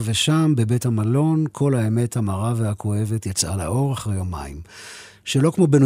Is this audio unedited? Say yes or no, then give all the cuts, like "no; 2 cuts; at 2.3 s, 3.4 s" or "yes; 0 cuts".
yes; 0 cuts